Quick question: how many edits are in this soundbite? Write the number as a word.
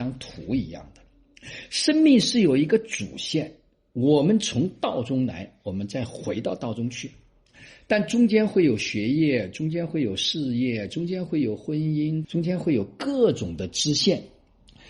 one